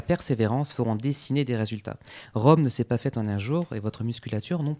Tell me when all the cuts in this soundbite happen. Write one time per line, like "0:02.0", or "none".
none